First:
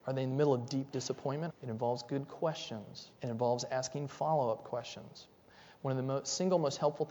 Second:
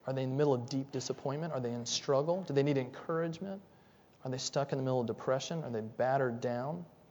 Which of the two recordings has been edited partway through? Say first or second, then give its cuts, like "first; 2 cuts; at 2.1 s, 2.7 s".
first; 2 cuts; at 1.5 s, 3.1 s